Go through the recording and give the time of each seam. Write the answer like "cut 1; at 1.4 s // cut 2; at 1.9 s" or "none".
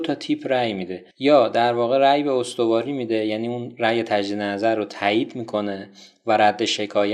cut 1; at 1.1 s